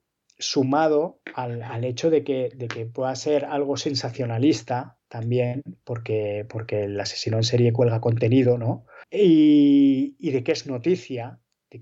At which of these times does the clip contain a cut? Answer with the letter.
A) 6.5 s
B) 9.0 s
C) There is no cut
B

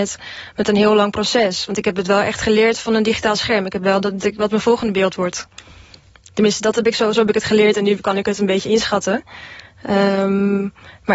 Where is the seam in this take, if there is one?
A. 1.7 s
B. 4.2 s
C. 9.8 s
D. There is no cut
B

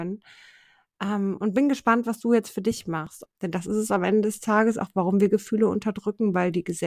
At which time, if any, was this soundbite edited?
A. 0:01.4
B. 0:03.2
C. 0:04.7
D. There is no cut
B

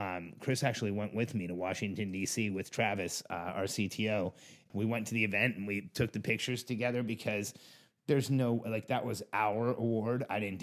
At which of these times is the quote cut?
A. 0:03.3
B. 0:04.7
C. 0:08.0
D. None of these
B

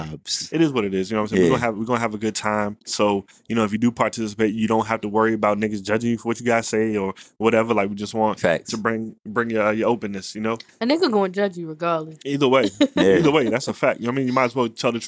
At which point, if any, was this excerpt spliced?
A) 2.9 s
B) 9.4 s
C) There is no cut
A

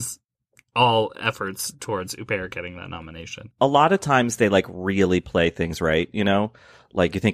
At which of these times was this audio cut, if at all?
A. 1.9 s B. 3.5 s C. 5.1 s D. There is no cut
B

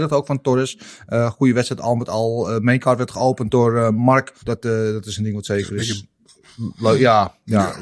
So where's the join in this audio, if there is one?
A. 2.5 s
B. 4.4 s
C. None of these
B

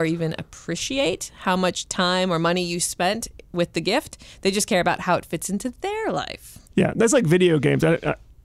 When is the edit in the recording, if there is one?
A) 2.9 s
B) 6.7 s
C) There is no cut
B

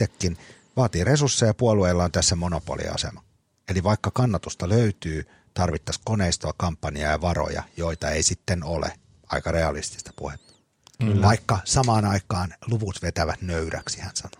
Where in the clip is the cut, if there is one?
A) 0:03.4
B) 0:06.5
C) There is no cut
C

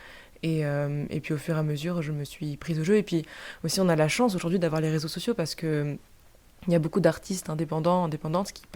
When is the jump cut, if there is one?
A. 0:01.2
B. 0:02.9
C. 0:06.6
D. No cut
D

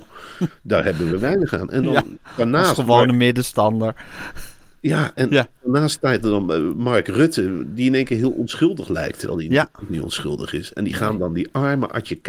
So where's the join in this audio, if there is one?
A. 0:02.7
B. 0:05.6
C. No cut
C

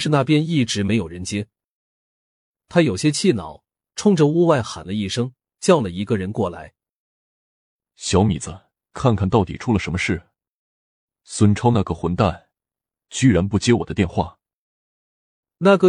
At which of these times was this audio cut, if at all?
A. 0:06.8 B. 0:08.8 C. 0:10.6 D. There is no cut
B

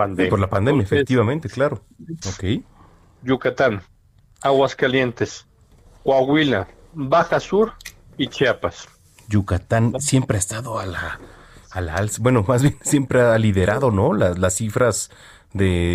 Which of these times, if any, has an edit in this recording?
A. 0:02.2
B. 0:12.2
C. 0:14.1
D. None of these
A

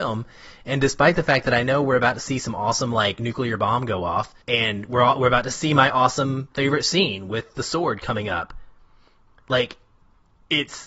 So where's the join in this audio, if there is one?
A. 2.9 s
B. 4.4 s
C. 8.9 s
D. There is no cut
B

